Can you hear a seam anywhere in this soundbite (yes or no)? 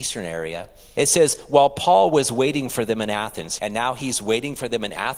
yes